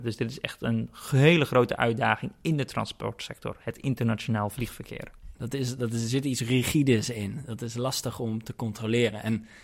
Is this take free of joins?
no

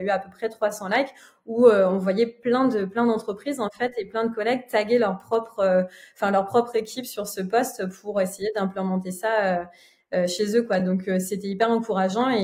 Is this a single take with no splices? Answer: yes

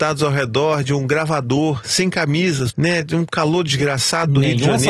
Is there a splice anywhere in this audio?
yes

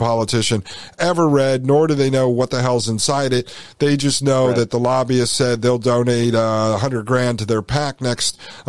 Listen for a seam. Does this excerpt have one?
no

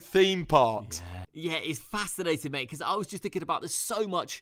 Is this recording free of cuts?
no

